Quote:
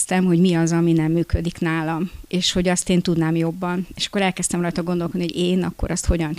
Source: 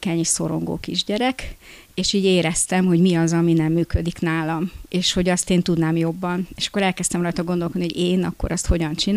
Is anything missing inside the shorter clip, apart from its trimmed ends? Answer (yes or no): no